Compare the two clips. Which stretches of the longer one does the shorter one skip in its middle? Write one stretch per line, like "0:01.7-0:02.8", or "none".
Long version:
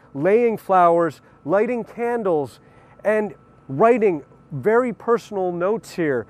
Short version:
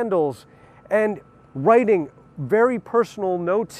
none